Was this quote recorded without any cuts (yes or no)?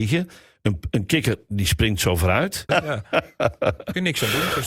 no